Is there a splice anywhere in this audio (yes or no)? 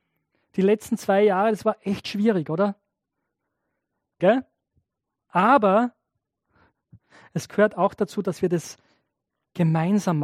yes